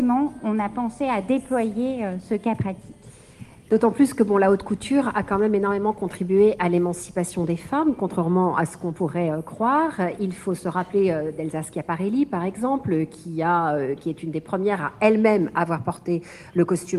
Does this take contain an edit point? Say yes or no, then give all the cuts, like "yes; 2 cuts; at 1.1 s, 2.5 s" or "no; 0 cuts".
no; 0 cuts